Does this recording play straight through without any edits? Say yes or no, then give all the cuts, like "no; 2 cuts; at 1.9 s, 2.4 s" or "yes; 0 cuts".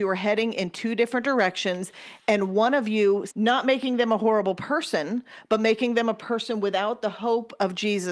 no; 1 cut; at 3.3 s